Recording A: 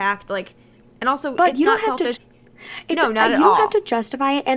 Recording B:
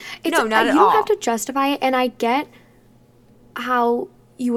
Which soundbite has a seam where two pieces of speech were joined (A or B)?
A